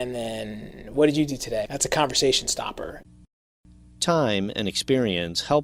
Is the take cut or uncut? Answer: cut